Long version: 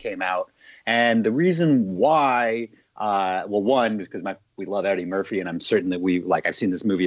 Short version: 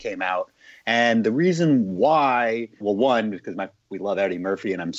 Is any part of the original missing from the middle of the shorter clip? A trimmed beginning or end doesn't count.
yes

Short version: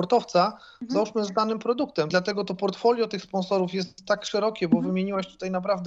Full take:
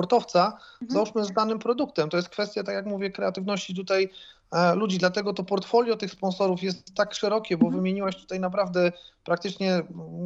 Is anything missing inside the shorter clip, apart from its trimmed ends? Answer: yes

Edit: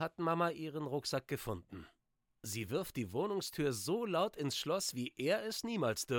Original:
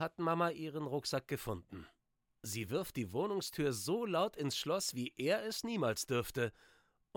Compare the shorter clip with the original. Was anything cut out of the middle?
no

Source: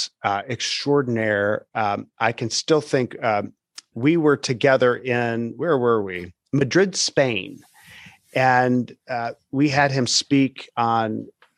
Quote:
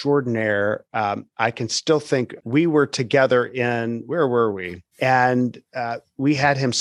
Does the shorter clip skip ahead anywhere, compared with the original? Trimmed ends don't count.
yes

